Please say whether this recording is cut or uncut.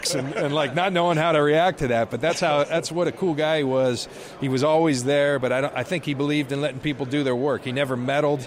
uncut